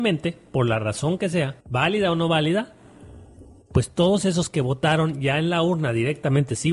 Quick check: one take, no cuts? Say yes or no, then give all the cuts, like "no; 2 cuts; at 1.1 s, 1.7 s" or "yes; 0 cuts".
no; 1 cut; at 1.6 s